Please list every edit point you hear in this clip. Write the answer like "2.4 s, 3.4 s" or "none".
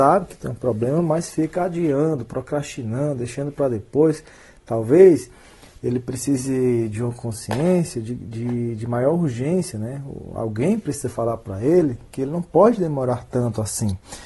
none